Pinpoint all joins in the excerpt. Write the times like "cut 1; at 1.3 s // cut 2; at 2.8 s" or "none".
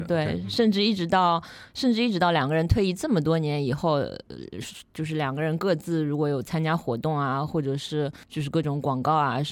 cut 1; at 8.2 s